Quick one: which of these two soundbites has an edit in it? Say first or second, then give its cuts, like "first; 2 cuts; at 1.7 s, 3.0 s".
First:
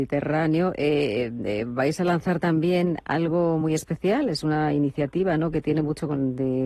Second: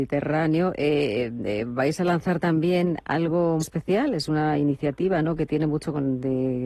second; 1 cut; at 3.6 s